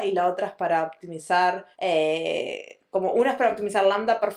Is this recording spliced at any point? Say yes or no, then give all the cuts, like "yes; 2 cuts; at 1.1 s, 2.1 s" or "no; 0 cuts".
yes; 1 cut; at 1.7 s